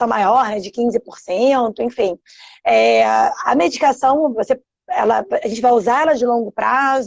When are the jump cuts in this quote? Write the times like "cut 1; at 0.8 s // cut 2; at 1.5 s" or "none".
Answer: none

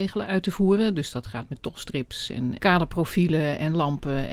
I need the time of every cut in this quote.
cut 1; at 2.6 s

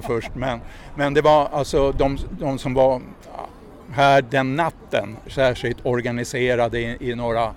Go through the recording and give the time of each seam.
cut 1; at 5.3 s

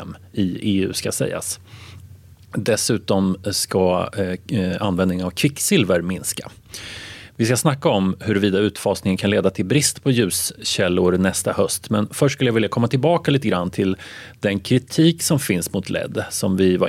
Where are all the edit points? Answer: none

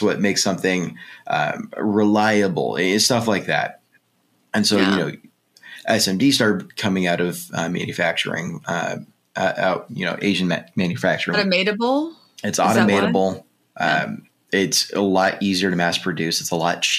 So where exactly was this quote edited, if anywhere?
cut 1; at 11.3 s

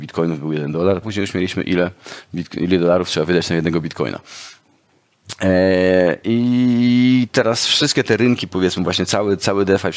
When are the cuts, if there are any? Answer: cut 1; at 1.0 s

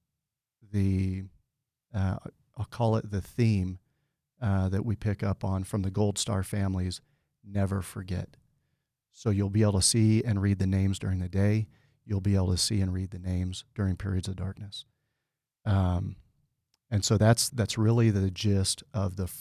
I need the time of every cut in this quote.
cut 1; at 17.5 s

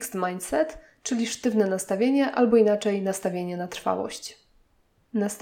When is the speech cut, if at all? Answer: none

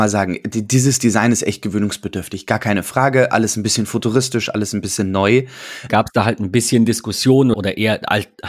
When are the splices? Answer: cut 1; at 5.9 s // cut 2; at 7.5 s

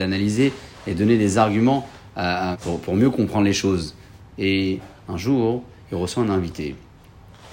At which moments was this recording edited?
cut 1; at 2.5 s // cut 2; at 4.2 s

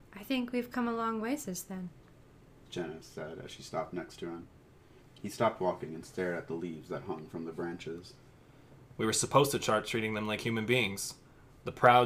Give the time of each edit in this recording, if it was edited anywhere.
cut 1; at 5.0 s // cut 2; at 8.9 s

